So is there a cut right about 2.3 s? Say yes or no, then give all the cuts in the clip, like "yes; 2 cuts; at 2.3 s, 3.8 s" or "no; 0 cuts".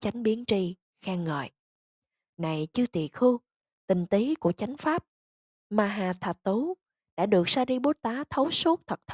no; 0 cuts